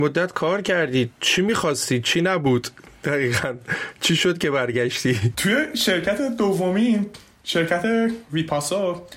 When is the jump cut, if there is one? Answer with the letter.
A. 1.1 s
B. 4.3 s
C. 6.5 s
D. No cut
A